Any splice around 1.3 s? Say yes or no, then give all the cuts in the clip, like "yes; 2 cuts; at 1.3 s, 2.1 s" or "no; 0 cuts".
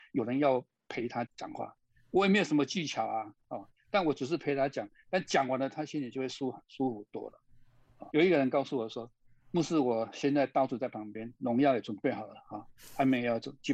yes; 2 cuts; at 1.3 s, 8.1 s